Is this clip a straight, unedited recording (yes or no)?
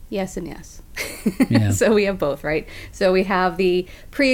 yes